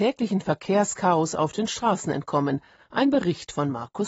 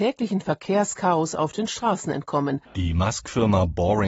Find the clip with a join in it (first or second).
second